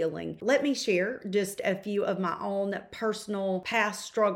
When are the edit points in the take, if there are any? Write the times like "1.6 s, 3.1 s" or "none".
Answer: none